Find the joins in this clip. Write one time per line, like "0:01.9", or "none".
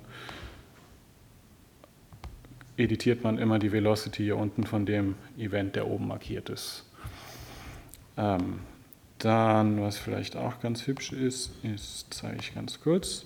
none